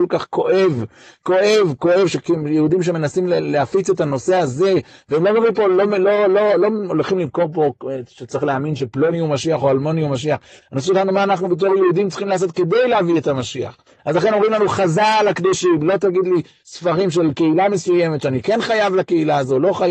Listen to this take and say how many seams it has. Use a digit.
1